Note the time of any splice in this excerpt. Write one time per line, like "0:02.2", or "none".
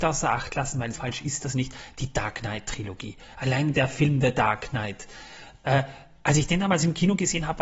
0:00.9